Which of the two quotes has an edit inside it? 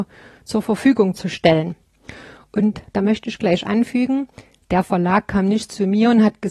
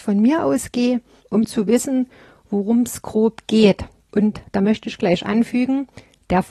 second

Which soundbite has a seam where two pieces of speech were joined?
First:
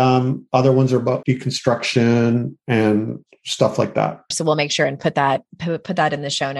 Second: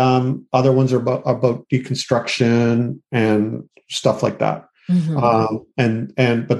first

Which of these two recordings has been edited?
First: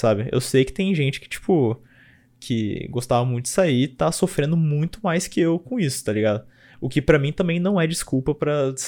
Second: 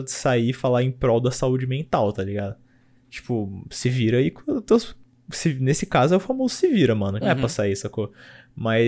second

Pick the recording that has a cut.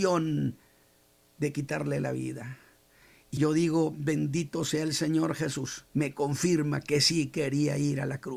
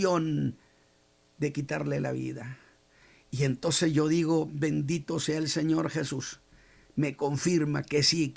first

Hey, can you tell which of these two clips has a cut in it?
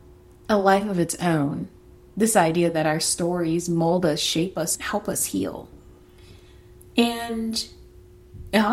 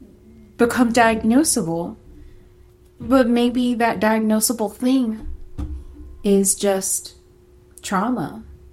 first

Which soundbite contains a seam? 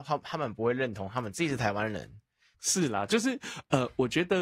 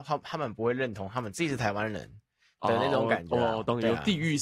first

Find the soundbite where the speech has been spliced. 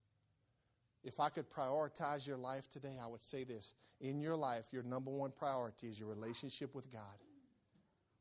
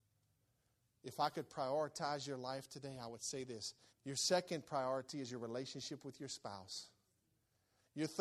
second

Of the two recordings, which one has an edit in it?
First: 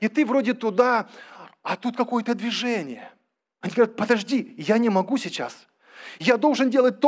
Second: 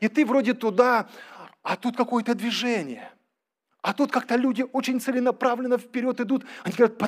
first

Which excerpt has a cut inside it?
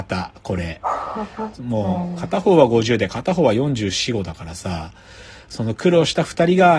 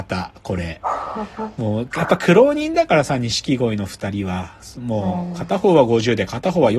first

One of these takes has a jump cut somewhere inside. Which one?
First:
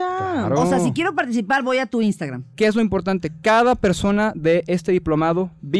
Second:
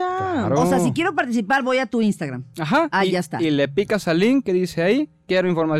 first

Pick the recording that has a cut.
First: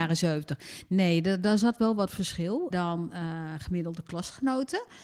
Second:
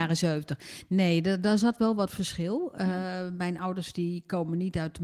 first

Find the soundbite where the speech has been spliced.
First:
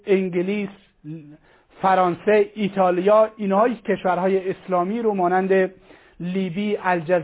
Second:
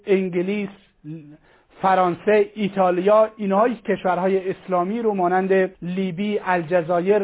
second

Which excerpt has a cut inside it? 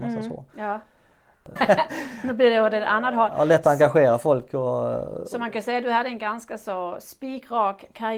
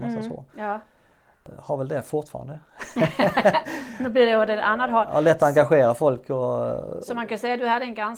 first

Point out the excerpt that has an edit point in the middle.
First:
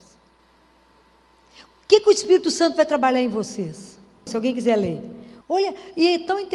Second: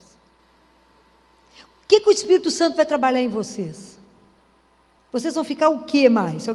first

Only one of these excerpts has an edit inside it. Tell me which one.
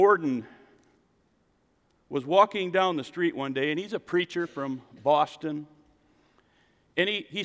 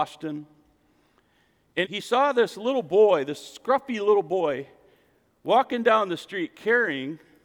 second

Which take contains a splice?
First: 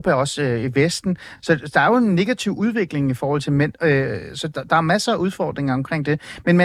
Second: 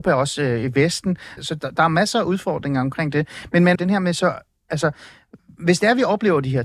second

